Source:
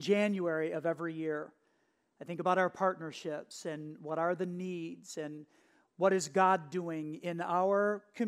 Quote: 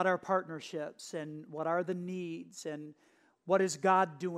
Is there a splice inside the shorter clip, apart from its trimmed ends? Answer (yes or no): no